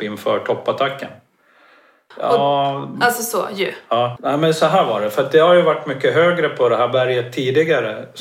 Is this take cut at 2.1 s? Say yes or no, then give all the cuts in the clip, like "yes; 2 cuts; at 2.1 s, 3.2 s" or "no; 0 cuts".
yes; 2 cuts; at 2.1 s, 4.2 s